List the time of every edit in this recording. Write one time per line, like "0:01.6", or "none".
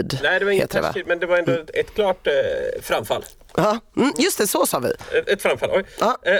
none